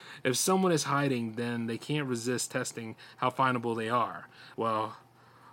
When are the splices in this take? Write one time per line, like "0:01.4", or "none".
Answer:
0:04.5